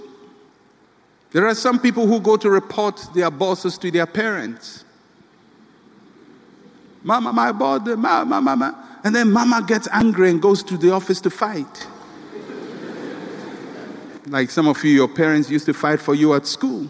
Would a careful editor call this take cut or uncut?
cut